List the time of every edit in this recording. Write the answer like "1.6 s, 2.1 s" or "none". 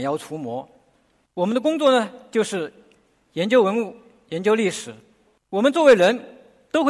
5.3 s